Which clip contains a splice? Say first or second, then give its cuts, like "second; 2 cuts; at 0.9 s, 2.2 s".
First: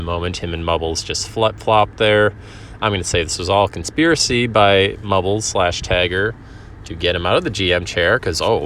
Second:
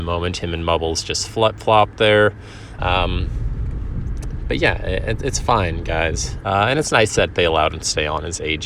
second; 2 cuts; at 2.8 s, 6.4 s